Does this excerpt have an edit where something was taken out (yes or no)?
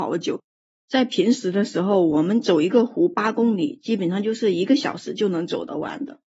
no